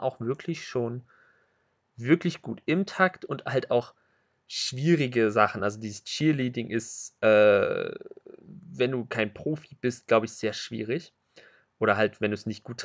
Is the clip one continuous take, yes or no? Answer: yes